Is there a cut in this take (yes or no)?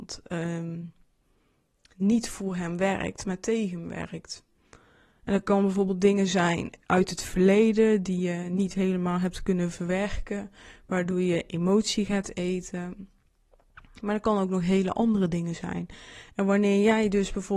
no